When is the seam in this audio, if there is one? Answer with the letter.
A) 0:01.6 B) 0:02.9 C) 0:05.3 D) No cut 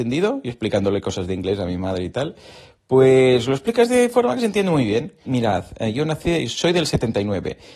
C